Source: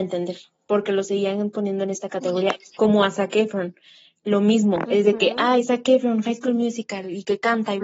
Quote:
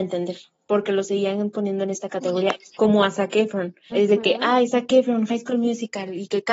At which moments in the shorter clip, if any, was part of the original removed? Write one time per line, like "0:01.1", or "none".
0:03.9